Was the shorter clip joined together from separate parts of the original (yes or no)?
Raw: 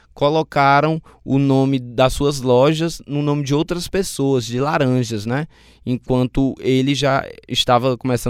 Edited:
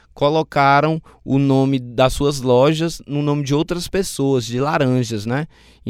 no